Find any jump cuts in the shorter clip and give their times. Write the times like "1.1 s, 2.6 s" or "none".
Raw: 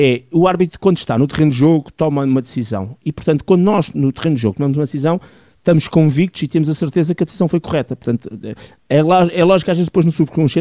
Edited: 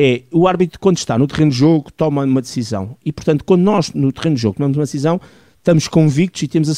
none